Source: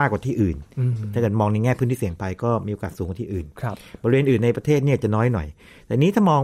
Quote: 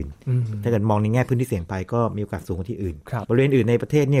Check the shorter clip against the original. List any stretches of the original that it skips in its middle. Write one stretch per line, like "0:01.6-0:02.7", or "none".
0:03.7-0:04.0